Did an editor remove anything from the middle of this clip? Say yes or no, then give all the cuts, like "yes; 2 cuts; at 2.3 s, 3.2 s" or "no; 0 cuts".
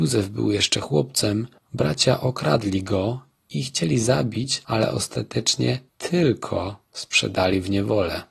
yes; 2 cuts; at 1.6 s, 5.9 s